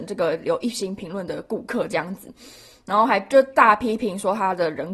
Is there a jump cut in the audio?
no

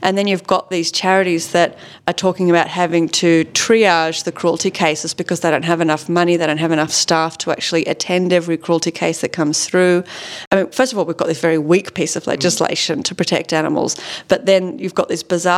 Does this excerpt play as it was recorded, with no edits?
yes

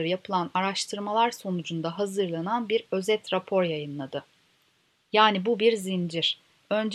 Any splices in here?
yes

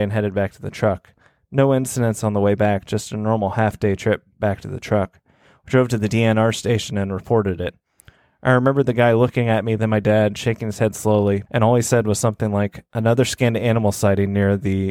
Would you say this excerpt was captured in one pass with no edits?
no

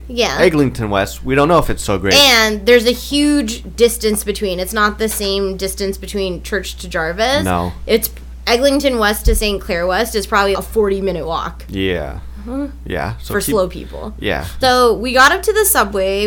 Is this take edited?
yes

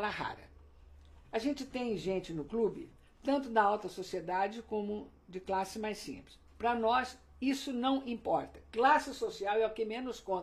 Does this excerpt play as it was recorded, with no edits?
yes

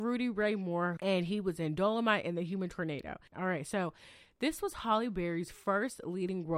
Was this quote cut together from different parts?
yes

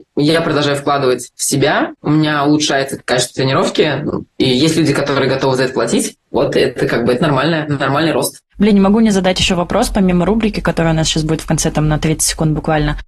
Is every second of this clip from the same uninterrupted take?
yes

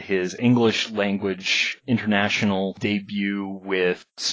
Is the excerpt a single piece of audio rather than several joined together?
yes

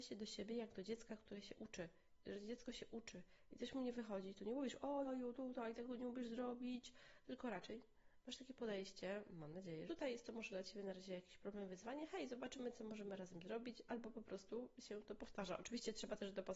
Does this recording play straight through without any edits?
no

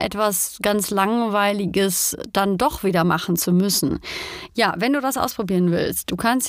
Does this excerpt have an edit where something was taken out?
yes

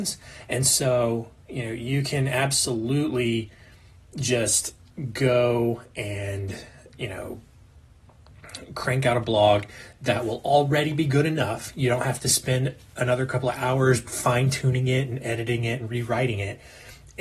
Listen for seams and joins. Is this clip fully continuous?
no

